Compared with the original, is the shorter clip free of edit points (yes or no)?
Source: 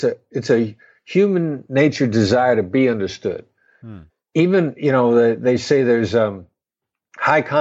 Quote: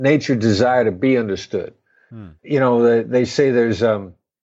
no